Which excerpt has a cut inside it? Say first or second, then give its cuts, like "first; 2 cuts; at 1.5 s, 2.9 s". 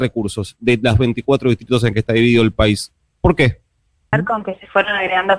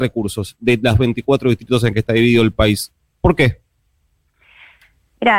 first; 1 cut; at 4.1 s